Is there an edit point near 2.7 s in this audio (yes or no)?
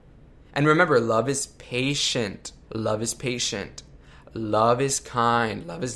yes